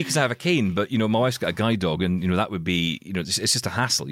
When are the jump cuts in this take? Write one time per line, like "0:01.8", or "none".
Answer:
none